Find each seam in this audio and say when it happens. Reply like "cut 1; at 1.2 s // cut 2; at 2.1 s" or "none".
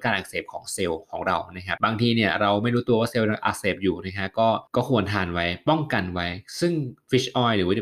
cut 1; at 1.8 s // cut 2; at 4.7 s

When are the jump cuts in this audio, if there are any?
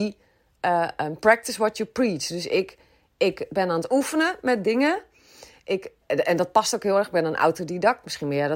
cut 1; at 6.0 s

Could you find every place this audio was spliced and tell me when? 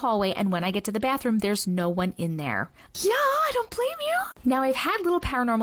cut 1; at 2.9 s

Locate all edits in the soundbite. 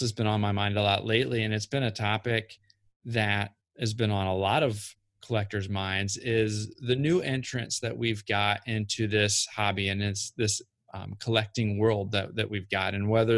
none

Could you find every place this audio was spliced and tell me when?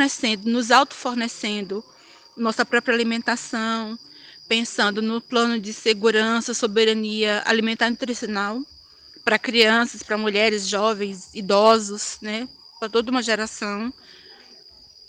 none

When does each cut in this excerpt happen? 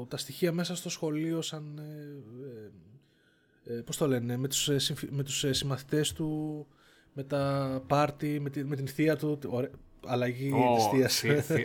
none

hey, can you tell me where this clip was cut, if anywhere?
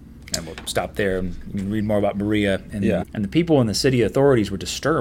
cut 1; at 3.0 s

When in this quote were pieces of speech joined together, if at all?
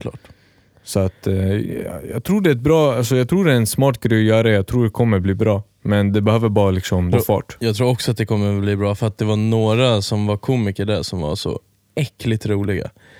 cut 1; at 7.1 s

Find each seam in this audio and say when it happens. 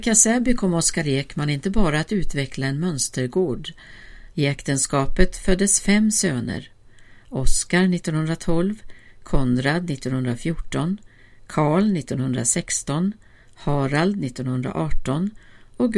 cut 1; at 4.3 s

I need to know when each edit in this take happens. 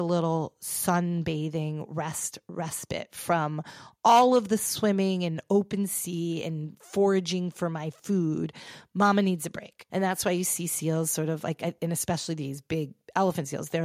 cut 1; at 9.9 s

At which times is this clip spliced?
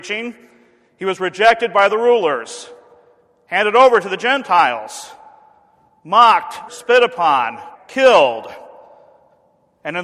cut 1; at 6.7 s // cut 2; at 7.8 s

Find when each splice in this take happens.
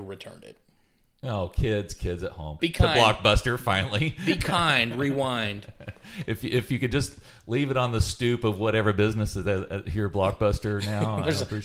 cut 1; at 2.6 s

